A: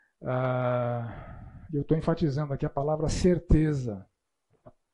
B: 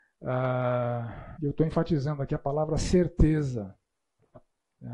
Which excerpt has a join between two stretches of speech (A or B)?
B